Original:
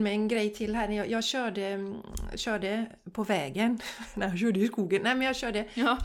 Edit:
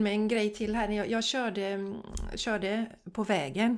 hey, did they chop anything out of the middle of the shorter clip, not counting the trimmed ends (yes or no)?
no